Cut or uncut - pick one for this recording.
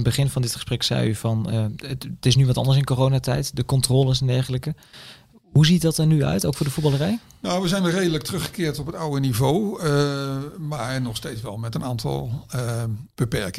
uncut